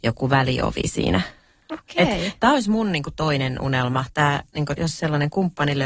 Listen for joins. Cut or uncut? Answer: cut